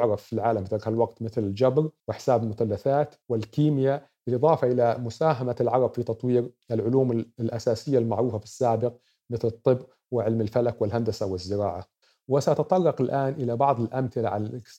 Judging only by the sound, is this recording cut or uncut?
cut